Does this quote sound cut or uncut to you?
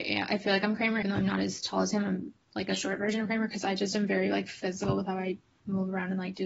cut